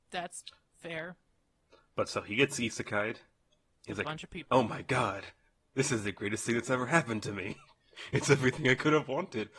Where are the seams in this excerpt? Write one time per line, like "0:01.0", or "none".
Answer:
none

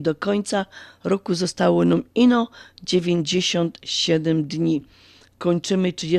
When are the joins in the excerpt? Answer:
none

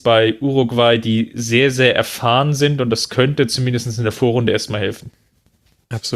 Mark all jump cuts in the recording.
none

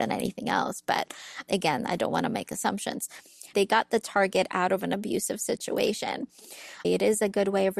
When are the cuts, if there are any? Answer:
0:03.5
0:06.8

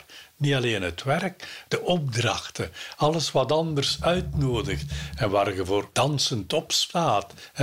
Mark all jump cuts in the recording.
0:01.7

